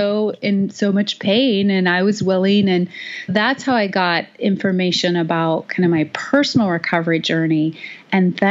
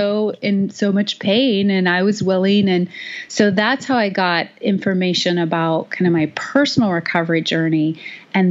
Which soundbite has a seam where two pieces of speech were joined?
first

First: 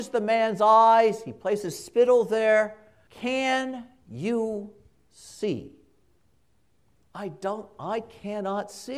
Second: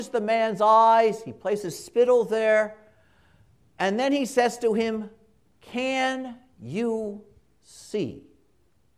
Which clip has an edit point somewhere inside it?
first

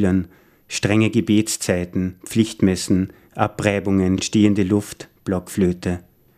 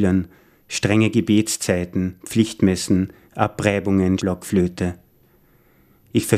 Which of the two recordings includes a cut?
second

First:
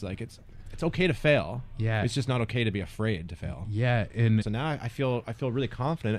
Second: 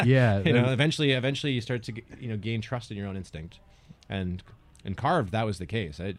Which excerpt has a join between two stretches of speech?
first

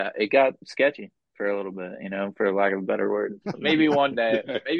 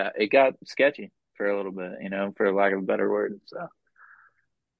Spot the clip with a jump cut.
first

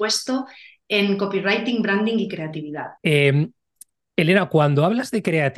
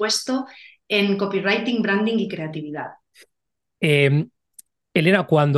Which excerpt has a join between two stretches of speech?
first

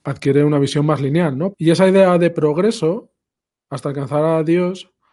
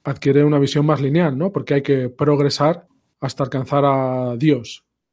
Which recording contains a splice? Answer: first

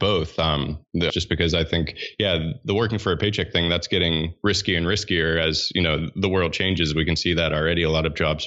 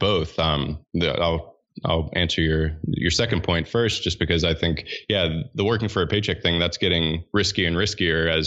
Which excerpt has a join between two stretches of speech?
first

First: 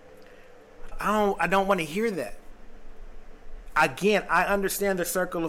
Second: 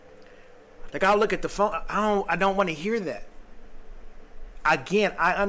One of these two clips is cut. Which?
first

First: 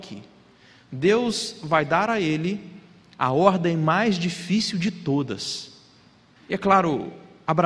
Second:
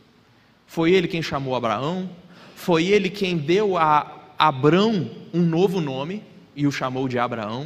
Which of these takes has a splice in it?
first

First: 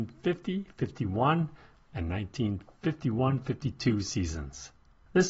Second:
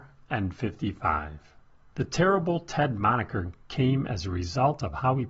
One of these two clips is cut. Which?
second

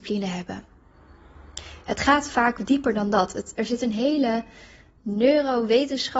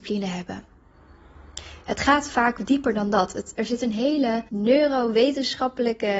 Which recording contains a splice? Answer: second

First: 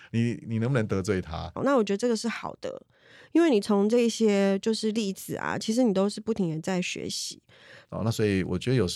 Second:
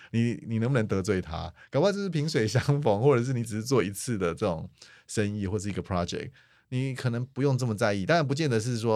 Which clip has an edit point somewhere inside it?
first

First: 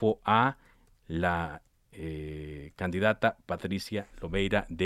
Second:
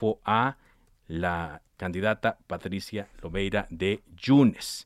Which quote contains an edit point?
second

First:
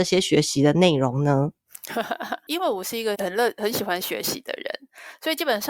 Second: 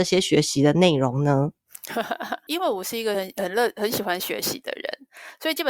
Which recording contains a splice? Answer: first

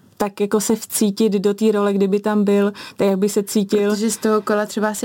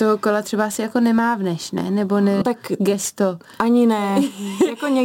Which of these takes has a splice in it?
second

